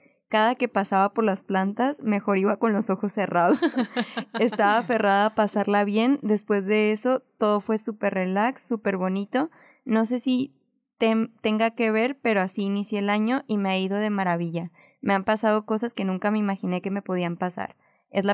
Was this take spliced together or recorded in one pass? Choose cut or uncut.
uncut